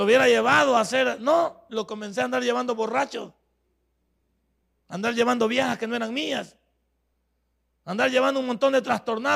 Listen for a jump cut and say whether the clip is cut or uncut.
uncut